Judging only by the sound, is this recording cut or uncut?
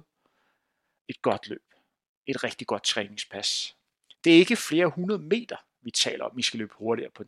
uncut